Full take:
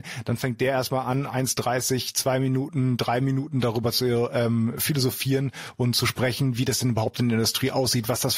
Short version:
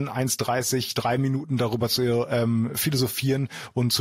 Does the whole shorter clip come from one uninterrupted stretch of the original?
no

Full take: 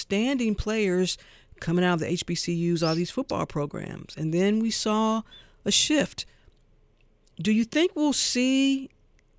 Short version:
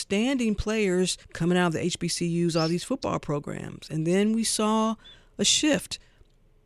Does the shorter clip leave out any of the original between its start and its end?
yes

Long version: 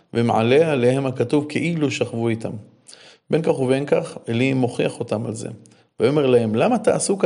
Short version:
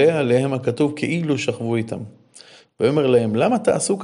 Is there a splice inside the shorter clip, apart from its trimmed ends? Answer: yes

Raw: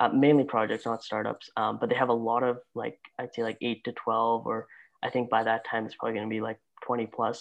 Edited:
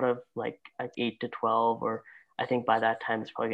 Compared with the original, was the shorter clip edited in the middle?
yes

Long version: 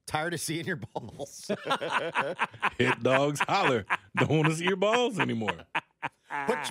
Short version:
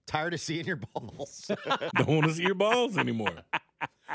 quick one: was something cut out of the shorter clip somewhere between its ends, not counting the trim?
yes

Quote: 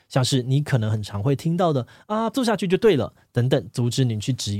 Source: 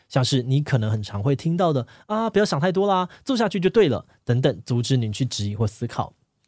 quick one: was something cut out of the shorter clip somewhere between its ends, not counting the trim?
yes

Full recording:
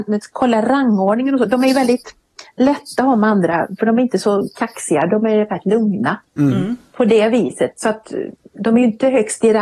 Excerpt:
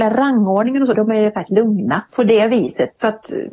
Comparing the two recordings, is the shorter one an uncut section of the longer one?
no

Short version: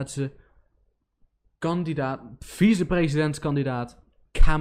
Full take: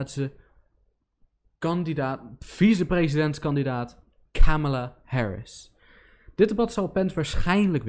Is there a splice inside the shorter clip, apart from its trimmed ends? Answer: no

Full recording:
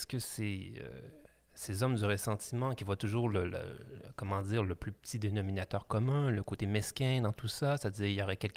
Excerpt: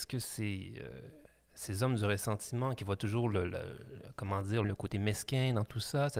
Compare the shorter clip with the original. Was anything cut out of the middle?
yes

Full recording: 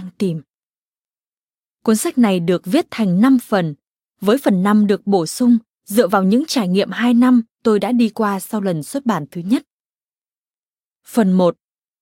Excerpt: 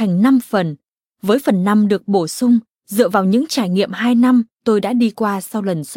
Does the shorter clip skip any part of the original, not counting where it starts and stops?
no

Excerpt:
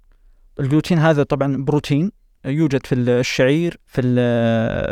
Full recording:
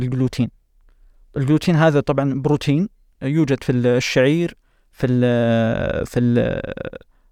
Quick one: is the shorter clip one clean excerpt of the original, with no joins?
no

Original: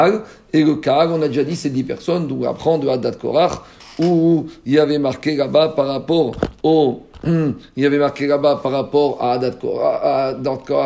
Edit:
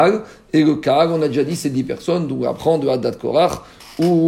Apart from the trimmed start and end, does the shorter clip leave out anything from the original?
no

